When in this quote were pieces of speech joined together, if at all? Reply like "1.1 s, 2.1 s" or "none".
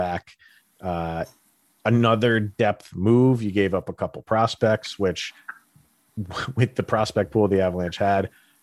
none